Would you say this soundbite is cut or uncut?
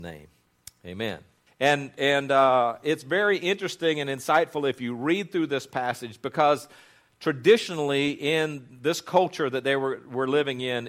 cut